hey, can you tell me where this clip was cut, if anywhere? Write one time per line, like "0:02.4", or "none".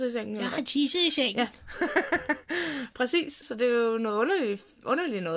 0:03.4